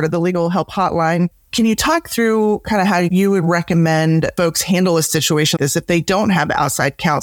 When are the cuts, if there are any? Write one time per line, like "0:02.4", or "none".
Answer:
0:05.6